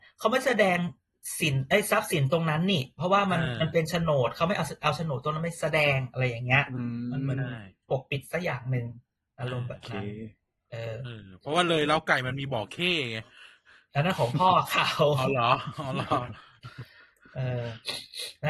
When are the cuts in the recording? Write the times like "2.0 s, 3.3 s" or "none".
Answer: none